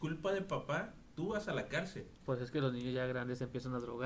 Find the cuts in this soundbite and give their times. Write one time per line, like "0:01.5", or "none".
0:02.2